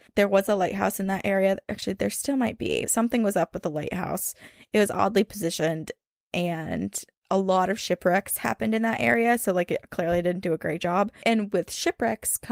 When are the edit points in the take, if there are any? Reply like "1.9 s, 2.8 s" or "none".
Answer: 2.9 s